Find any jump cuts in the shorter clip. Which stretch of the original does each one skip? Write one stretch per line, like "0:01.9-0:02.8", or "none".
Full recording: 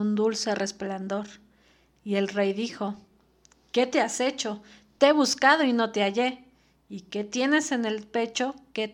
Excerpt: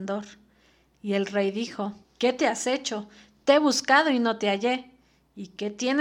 0:03.1-0:03.6